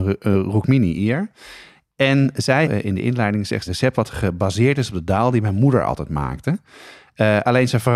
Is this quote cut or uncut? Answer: cut